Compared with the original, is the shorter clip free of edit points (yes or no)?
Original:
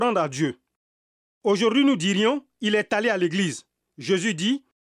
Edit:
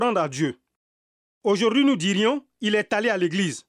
yes